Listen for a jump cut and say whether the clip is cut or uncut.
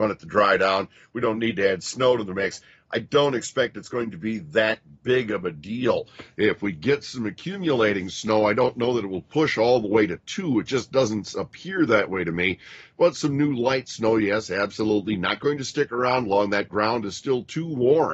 uncut